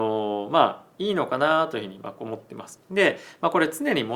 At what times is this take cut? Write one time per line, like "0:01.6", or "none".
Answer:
0:02.8